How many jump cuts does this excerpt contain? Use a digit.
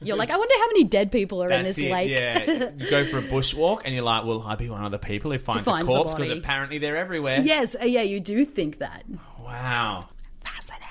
0